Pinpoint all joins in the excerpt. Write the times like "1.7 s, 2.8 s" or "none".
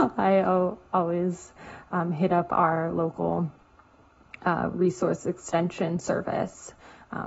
none